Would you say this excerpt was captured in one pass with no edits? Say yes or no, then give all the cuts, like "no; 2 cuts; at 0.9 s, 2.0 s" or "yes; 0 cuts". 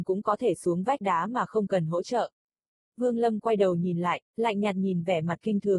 yes; 0 cuts